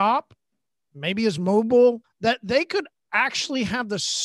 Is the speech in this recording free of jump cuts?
no; 1 cut; at 2.0 s

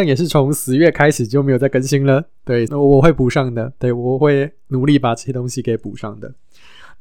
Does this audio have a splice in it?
yes; 1 cut; at 2.7 s

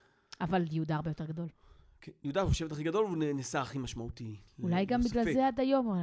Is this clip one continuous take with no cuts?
yes; 0 cuts

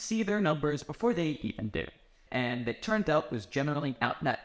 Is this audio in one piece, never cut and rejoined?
no; 1 cut; at 2.3 s

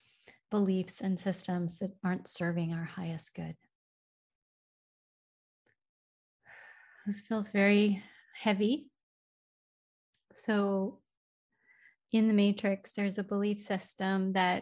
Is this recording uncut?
yes; 0 cuts

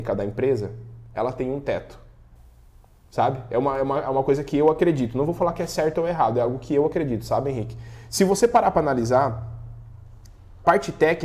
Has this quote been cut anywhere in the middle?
no; 0 cuts

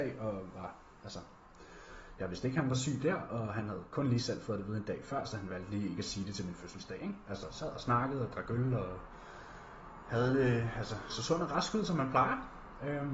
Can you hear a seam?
yes; 2 cuts; at 7.2 s, 11.1 s

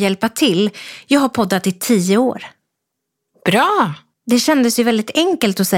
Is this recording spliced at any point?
no; 0 cuts

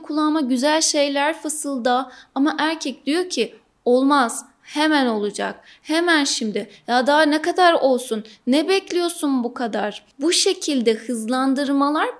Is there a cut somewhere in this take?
no; 0 cuts

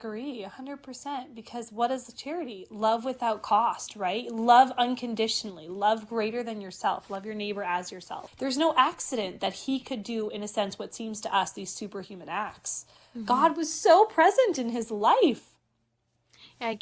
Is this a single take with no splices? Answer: no; 1 cut; at 8.3 s

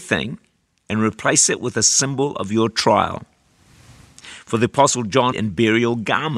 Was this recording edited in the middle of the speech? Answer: yes; 1 cut; at 5.3 s

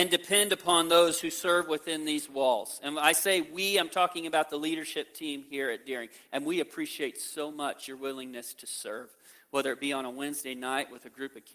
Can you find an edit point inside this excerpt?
no; 0 cuts

